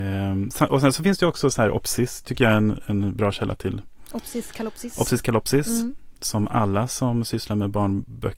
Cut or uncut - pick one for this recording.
uncut